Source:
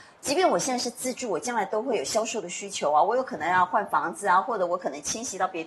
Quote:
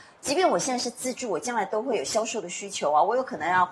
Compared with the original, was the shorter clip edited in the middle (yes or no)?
no